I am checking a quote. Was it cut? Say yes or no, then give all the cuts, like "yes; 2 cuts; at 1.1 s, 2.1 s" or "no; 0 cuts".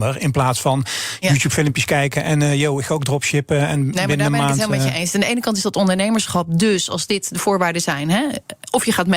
no; 0 cuts